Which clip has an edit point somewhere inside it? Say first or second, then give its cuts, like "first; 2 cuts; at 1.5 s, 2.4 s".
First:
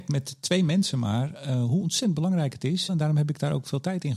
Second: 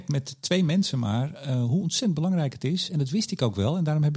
first; 1 cut; at 2.9 s